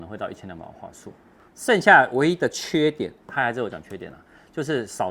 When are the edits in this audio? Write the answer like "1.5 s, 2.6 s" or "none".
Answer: 1.5 s